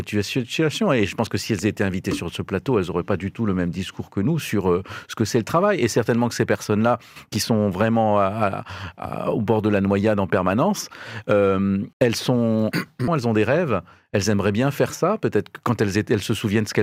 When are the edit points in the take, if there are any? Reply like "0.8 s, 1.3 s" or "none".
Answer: 11.9 s, 13.1 s